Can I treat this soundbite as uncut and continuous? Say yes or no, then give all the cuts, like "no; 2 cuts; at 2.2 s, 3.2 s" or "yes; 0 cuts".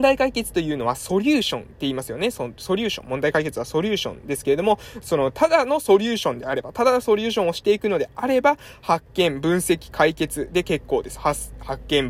yes; 0 cuts